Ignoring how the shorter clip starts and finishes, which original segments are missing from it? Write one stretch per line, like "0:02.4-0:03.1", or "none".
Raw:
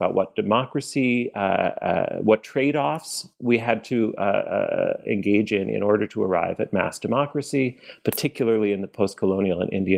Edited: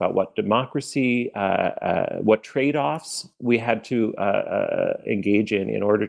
none